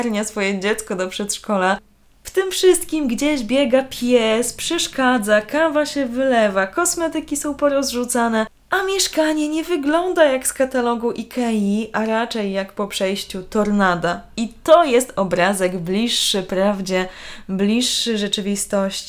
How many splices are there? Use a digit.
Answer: 0